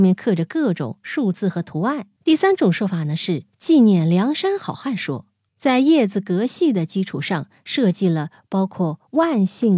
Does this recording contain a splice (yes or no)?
yes